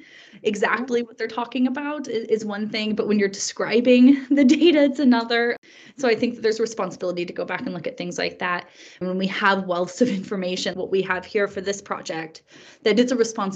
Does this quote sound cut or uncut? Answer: cut